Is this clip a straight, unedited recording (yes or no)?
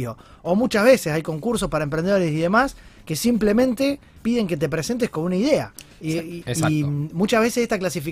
no